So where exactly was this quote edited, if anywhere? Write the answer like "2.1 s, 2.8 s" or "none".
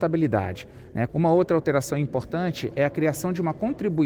1.1 s